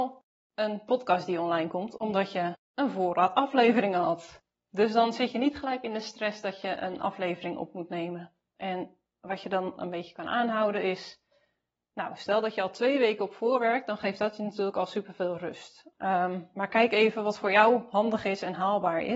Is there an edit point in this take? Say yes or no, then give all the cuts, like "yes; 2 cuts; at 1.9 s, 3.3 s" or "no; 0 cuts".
no; 0 cuts